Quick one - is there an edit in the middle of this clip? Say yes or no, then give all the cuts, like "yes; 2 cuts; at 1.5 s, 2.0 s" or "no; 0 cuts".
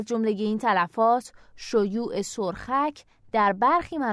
no; 0 cuts